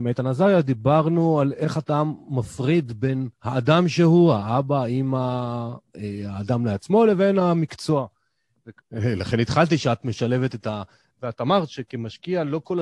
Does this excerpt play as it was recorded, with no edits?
no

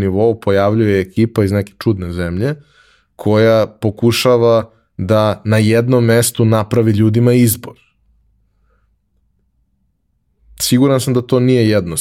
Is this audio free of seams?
yes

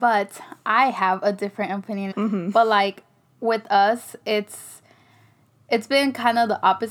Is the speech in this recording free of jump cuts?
no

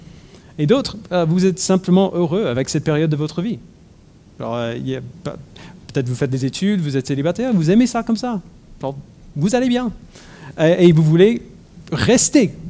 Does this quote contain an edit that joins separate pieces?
no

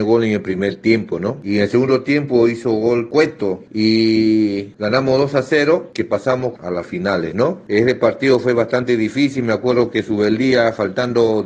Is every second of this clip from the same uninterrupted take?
yes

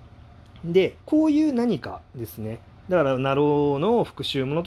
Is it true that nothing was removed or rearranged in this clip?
no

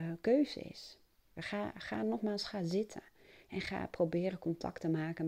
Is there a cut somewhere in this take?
yes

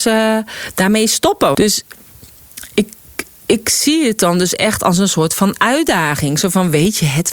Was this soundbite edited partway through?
yes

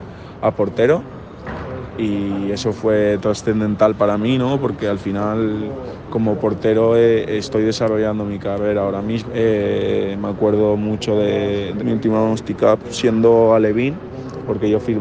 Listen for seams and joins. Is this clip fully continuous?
no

